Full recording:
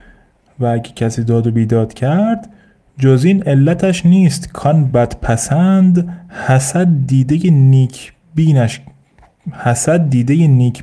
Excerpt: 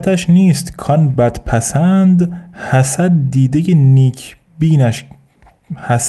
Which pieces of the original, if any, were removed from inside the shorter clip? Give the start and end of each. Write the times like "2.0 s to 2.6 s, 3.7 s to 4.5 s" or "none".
none